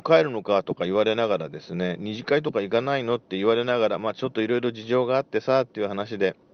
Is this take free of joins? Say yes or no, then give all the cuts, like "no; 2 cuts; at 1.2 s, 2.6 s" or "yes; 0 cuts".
yes; 0 cuts